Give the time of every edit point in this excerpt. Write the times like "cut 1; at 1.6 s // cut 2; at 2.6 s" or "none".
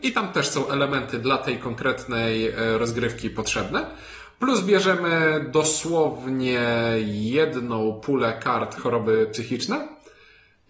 cut 1; at 8.8 s